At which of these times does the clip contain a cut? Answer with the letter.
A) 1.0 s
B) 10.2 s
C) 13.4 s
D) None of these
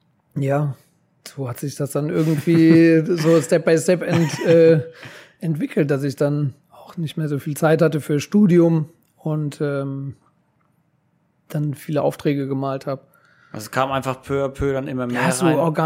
D